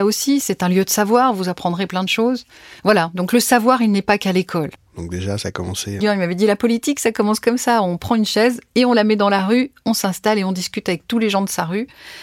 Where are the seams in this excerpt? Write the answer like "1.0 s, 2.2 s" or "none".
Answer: 4.8 s, 6.0 s